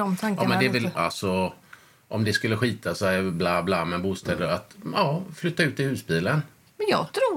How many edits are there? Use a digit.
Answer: 1